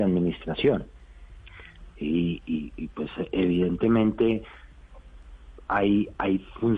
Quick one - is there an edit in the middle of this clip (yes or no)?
no